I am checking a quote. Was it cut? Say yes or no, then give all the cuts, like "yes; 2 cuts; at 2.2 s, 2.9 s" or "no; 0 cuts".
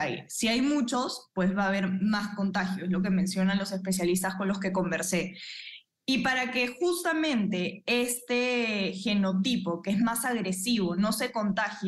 no; 0 cuts